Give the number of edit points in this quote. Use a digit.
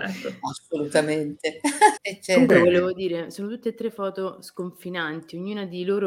1